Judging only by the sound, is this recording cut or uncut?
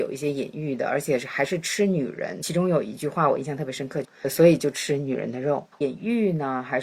cut